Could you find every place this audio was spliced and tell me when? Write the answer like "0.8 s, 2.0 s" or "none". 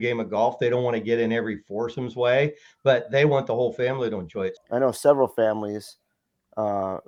4.6 s